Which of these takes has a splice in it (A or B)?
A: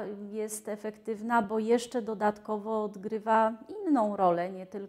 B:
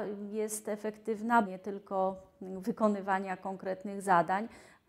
B